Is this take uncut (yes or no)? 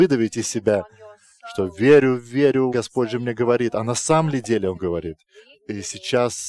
no